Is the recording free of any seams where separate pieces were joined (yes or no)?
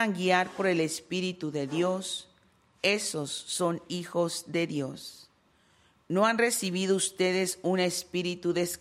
yes